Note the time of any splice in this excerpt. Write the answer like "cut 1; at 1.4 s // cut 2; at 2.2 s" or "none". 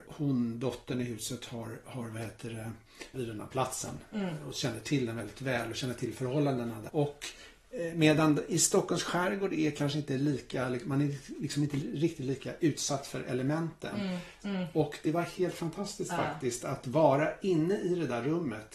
cut 1; at 3.1 s // cut 2; at 6.9 s // cut 3; at 14.4 s